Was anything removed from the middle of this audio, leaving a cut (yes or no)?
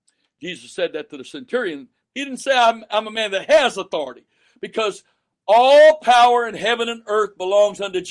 yes